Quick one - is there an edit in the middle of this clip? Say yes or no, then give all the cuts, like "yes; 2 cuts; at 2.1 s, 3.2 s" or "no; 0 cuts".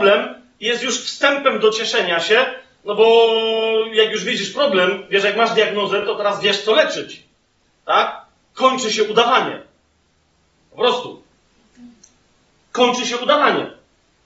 no; 0 cuts